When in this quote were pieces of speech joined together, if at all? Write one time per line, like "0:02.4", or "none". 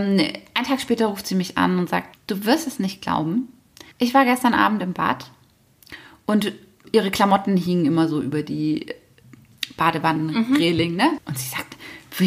0:02.1
0:03.9
0:11.2